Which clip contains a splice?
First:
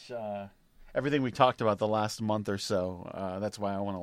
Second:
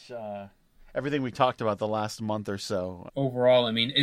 second; 1 cut; at 3.1 s

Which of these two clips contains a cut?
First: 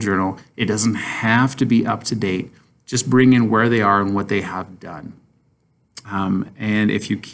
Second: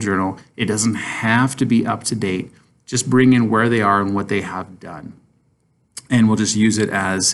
first; 1 cut; at 6.0 s

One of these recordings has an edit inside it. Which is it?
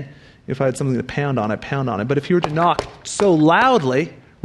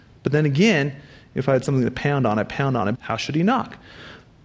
second; 1 cut; at 2.9 s

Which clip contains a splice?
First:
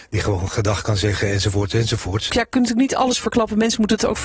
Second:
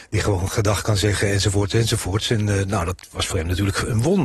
first; 1 cut; at 2.3 s

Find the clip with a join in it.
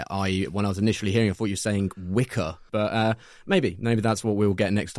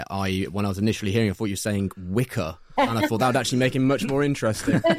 first; 1 cut; at 2.7 s

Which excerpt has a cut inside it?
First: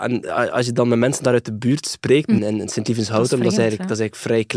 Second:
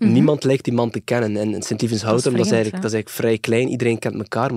first; 1 cut; at 2.4 s

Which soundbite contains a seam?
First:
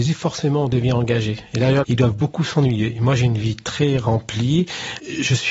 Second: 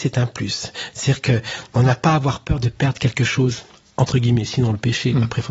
first; 1 cut; at 1.8 s

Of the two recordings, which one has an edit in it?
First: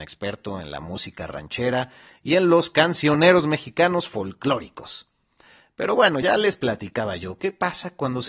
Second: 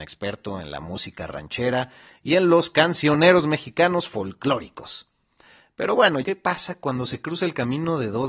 second; 1 cut; at 6.2 s

